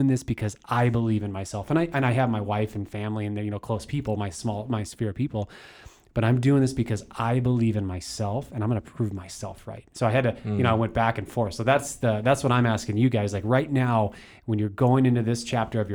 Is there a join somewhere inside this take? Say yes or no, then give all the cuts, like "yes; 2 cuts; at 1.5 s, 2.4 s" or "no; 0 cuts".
no; 0 cuts